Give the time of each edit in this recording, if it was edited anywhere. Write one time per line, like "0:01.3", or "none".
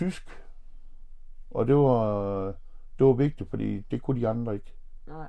none

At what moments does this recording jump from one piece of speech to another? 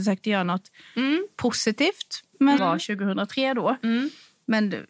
0:02.6

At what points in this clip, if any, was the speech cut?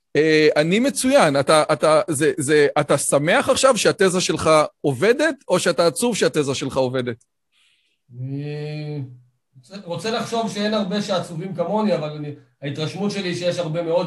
none

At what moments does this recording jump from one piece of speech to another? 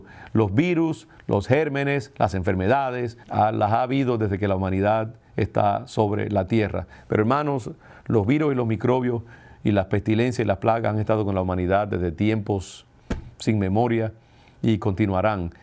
0:03.2
0:07.0

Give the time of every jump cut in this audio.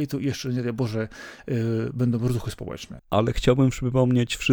0:03.0

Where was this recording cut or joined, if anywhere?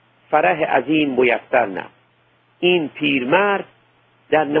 none

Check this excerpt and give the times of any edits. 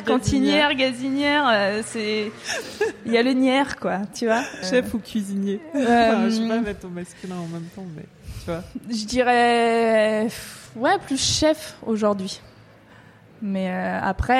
0:04.6
0:10.7

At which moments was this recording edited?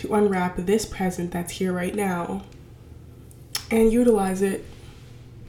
none

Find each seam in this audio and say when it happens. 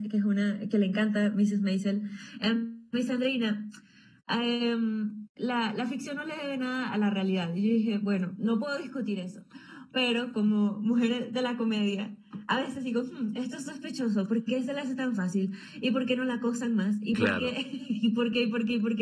none

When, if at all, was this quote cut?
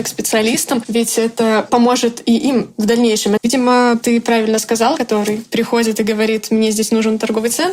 0:03.4
0:05.0

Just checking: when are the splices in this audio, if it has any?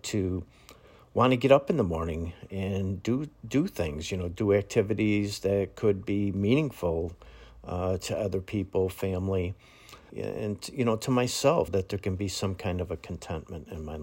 0:10.1
0:11.7

